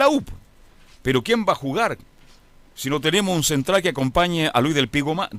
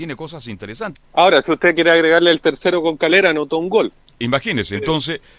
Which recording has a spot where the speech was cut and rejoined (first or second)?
second